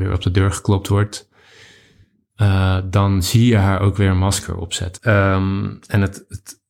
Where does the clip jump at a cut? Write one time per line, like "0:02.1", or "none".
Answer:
0:05.0

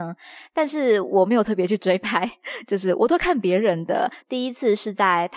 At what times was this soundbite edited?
0:04.2

